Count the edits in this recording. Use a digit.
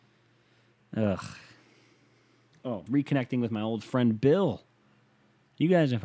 1